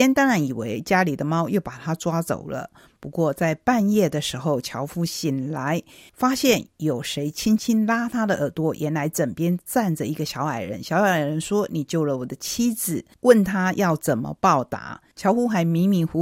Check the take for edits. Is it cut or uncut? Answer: uncut